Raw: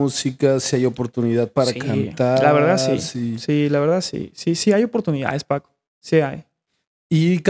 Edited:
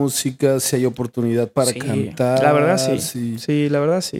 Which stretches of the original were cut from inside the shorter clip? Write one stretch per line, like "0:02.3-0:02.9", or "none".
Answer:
none